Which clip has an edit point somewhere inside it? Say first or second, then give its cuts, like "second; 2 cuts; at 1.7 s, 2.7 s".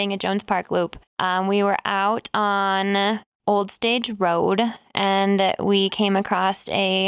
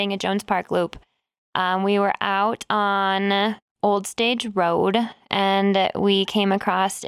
first; 1 cut; at 1.1 s